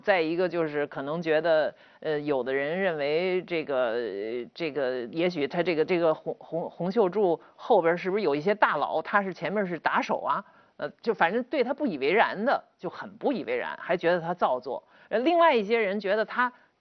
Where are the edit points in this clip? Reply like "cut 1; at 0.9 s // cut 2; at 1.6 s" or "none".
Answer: none